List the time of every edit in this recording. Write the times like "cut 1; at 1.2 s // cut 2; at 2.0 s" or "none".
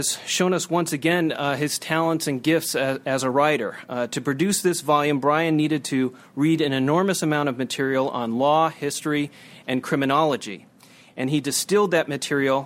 none